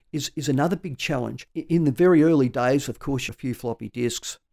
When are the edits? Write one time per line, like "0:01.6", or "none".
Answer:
0:03.3